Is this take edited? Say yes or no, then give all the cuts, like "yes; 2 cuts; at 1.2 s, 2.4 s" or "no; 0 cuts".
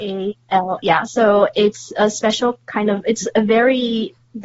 no; 0 cuts